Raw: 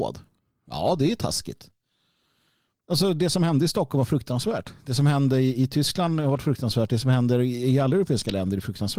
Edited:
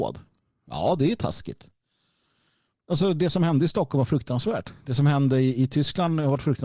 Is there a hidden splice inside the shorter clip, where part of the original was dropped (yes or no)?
no